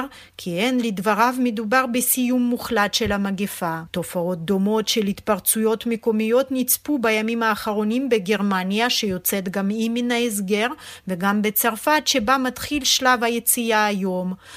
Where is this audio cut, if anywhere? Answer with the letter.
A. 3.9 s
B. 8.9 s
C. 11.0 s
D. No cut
A